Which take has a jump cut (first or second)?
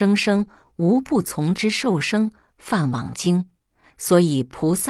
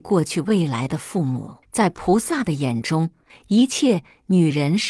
second